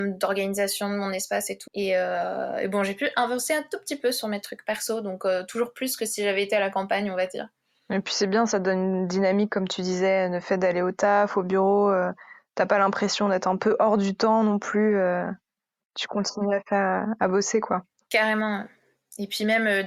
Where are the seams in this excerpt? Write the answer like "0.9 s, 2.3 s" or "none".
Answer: 1.7 s